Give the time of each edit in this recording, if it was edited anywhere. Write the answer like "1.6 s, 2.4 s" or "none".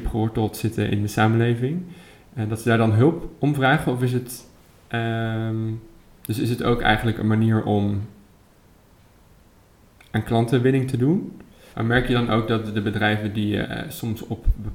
11.7 s, 13.6 s

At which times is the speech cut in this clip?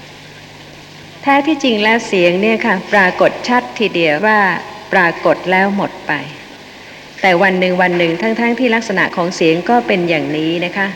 4.2 s

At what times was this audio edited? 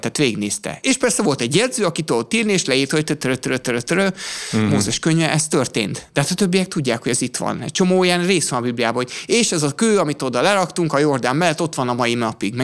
none

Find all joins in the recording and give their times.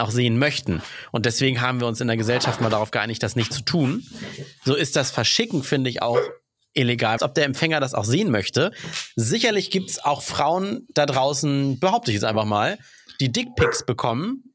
7.2 s

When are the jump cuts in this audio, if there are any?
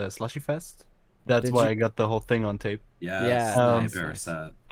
2.9 s

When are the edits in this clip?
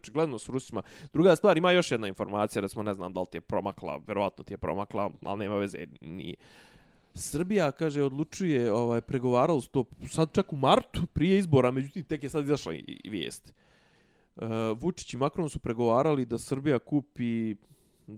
none

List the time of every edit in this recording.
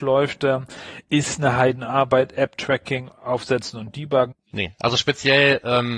4.3 s

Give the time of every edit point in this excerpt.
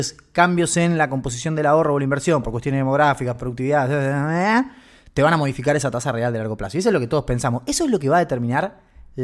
none

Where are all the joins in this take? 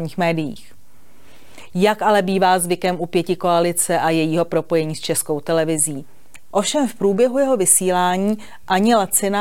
6.5 s

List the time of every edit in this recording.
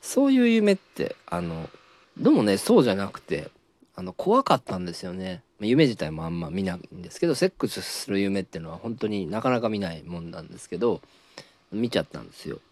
2.0 s, 5.6 s

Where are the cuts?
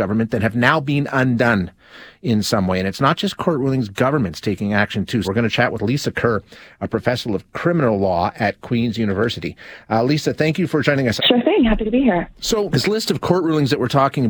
5.2 s, 11.2 s, 12.7 s

